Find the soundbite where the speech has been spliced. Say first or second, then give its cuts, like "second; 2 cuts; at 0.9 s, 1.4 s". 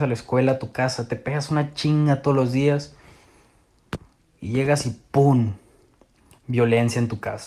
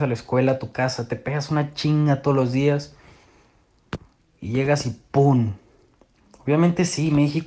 second; 1 cut; at 6.2 s